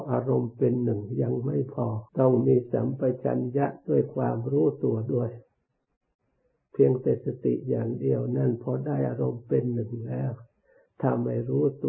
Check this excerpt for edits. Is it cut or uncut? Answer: cut